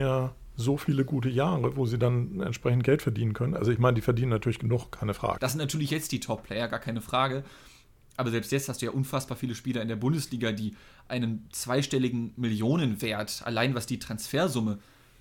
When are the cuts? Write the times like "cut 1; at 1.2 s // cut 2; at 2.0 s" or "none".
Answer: cut 1; at 5.4 s